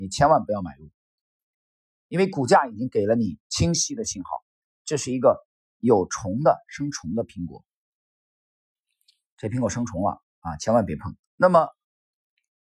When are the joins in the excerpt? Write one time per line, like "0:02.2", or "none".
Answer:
0:11.2